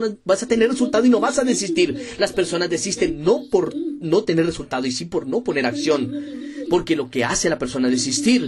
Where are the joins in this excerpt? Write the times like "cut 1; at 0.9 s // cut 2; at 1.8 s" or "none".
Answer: cut 1; at 6.6 s